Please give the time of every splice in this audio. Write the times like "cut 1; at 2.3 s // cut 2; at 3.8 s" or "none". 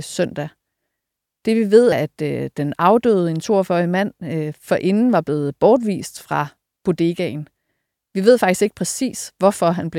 cut 1; at 1.9 s